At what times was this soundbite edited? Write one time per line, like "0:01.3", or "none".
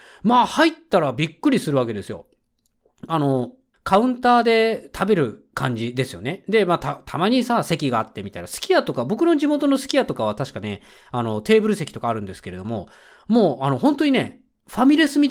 0:03.7